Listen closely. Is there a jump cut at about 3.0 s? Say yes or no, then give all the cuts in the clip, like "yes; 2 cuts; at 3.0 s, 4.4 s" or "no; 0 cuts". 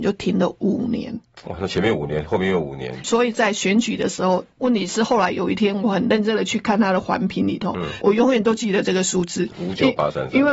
yes; 3 cuts; at 3.0 s, 4.6 s, 8.0 s